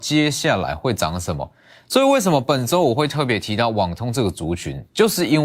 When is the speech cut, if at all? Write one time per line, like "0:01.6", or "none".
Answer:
none